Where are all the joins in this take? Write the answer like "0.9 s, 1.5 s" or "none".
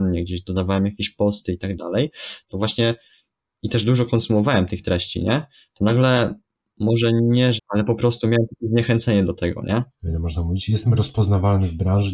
7.6 s, 9.9 s